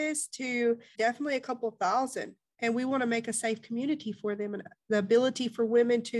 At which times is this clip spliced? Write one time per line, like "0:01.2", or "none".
0:00.9
0:02.5